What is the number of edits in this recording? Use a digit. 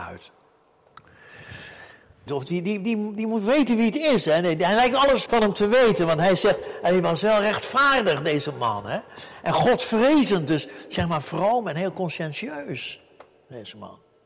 2